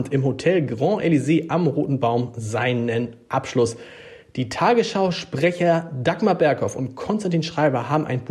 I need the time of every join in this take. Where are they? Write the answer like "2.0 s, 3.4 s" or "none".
none